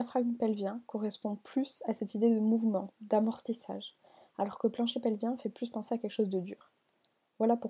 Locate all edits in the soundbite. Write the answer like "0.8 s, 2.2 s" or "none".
none